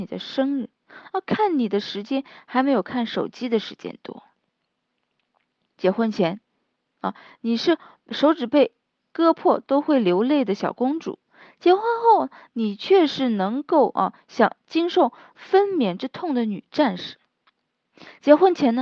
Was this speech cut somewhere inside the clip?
no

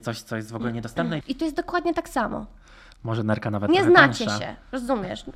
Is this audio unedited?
no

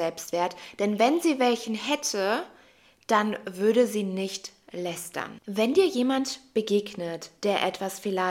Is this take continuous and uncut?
no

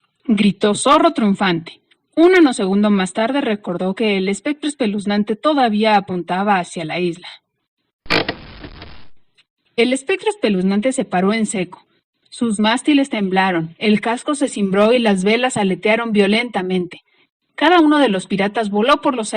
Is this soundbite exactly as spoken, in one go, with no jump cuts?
yes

